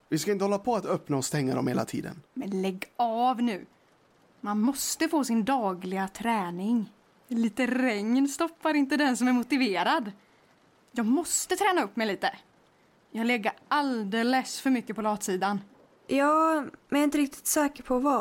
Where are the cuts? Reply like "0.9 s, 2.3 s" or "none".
7.1 s, 16.1 s

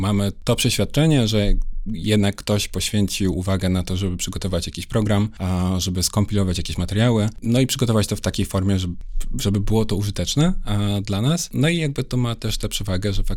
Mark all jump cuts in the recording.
none

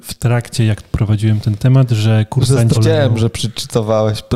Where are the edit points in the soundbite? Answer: 2.7 s

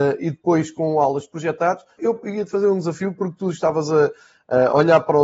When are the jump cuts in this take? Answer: 2.0 s

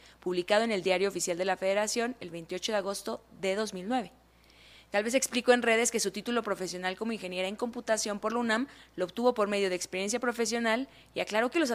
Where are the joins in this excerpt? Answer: none

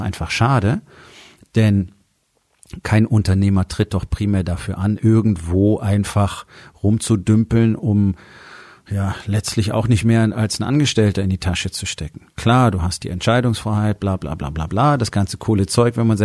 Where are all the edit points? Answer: none

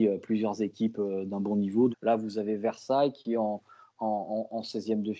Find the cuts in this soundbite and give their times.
1.9 s

